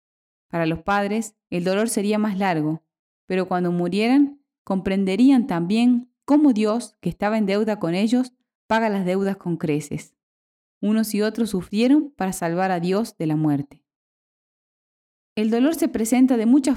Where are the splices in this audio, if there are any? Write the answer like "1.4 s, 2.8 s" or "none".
none